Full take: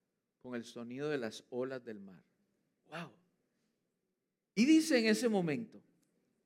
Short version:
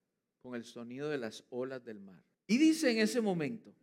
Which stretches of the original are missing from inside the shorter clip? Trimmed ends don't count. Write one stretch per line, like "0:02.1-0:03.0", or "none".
0:02.3-0:04.4